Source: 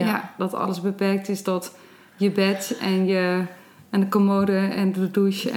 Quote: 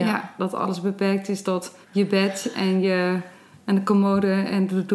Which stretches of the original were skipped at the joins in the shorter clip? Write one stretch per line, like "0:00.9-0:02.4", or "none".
0:01.8-0:02.1